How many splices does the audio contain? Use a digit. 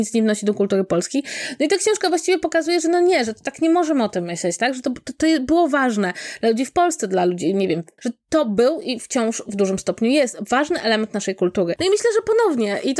2